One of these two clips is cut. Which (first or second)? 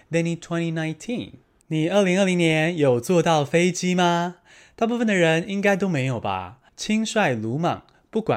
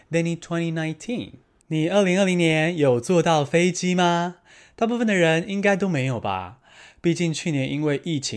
first